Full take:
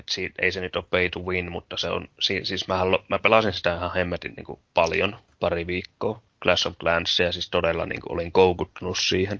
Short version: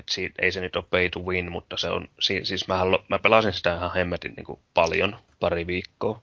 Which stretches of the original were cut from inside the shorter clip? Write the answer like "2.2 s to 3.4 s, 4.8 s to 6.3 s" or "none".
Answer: none